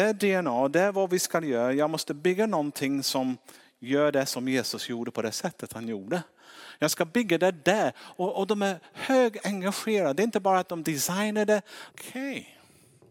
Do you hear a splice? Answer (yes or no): yes